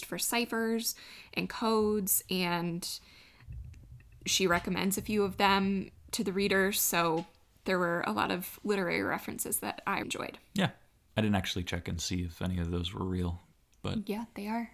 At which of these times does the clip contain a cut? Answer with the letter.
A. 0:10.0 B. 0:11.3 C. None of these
A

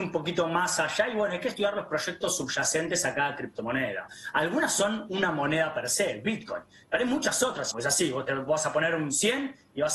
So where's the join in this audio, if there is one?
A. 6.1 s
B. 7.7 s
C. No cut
B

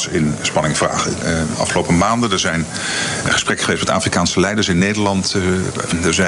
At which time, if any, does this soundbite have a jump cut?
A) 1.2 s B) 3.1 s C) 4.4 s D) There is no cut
A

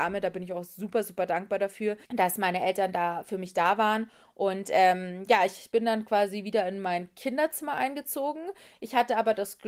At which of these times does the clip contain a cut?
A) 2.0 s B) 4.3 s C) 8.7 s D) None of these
A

